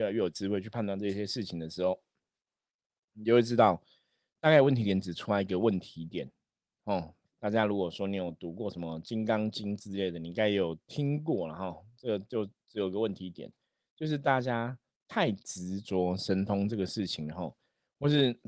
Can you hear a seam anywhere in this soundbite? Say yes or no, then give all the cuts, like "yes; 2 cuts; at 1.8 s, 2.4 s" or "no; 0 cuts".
yes; 1 cut; at 7.3 s